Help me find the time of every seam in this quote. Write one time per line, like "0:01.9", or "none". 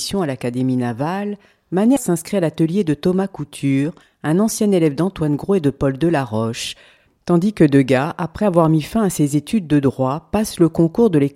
0:02.0